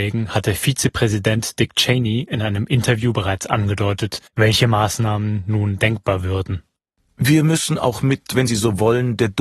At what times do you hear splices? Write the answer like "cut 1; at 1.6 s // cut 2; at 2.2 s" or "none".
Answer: cut 1; at 4.3 s